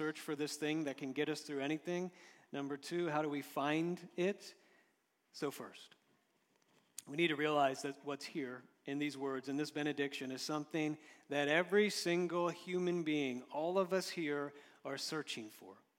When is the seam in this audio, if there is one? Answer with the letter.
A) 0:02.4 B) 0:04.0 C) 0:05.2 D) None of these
C